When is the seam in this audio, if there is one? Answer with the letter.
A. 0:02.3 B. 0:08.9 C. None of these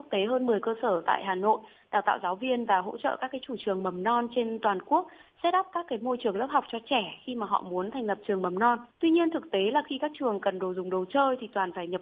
B